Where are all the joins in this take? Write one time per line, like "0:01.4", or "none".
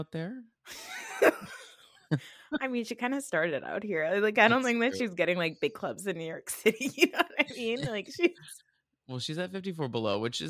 none